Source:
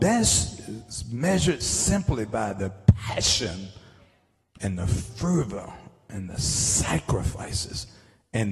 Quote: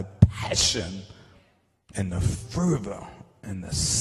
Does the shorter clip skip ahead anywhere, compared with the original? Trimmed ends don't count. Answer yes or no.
no